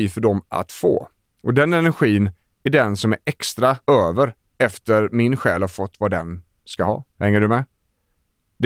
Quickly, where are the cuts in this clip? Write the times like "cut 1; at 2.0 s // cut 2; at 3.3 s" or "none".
cut 1; at 3.8 s // cut 2; at 7.1 s